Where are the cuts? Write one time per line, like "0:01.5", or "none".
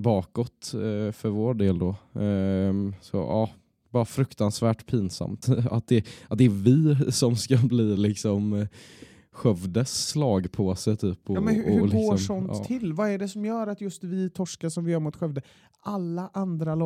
0:05.4